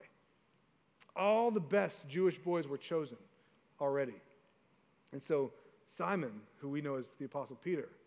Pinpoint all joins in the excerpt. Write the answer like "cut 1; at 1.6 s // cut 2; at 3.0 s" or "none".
none